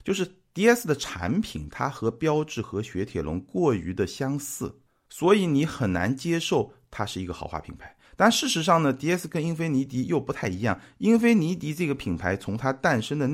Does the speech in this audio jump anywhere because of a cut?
no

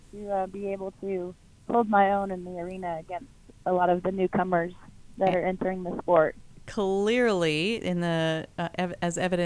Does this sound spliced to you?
no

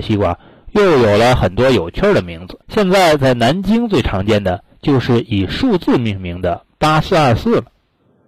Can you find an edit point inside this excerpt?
yes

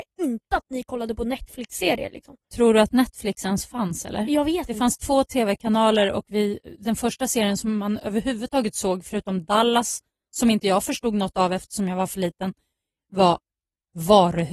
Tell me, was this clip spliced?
no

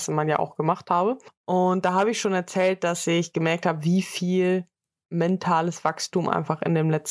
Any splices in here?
no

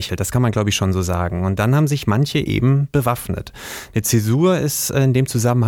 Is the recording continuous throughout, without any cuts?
yes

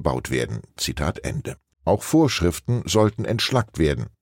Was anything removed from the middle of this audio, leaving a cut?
yes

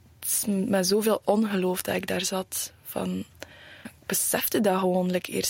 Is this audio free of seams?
no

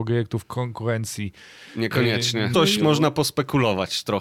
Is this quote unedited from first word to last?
no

